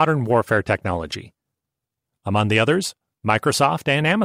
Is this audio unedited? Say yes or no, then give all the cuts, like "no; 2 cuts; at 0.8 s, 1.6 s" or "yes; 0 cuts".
yes; 0 cuts